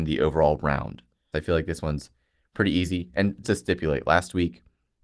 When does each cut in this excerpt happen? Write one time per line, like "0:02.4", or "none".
0:01.3
0:03.4